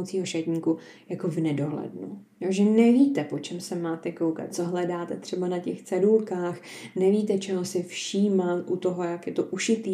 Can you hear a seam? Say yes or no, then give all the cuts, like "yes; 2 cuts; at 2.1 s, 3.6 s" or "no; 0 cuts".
yes; 2 cuts; at 2.3 s, 4.5 s